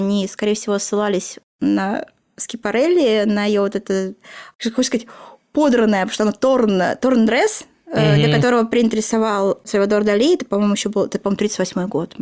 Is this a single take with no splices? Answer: yes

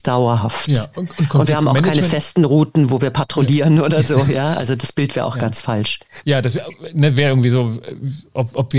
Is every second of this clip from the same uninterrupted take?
yes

